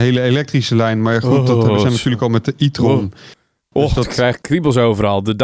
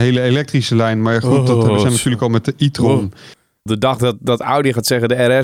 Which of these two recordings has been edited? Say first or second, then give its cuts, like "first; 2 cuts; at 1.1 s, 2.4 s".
second; 1 cut; at 3.7 s